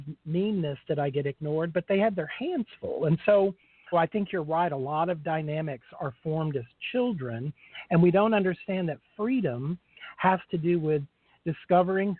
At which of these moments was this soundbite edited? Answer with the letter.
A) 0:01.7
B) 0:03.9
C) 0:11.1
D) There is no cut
B